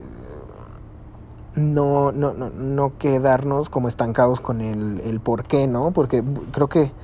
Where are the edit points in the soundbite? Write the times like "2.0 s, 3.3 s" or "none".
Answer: 5.0 s